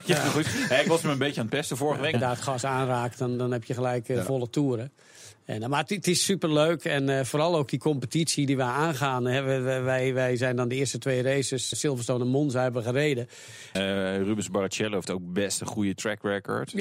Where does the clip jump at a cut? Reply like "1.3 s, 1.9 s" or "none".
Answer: 2.1 s, 11.7 s, 13.8 s